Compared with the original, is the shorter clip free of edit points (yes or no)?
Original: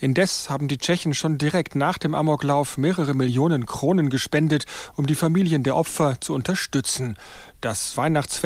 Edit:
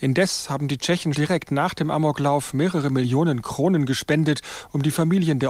no